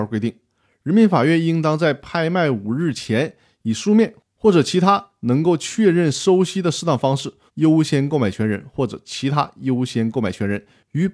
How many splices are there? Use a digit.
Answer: 1